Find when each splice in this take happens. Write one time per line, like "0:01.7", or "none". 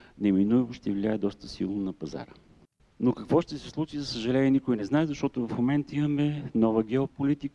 0:02.8